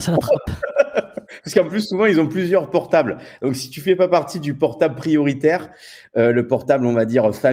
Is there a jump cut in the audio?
no; 0 cuts

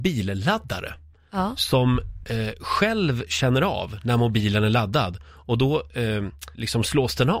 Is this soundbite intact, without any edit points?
yes; 0 cuts

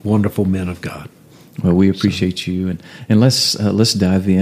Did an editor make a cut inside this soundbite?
no; 0 cuts

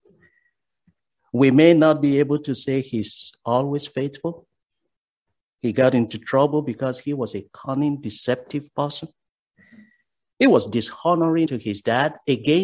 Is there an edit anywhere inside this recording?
yes; 1 cut; at 11.5 s

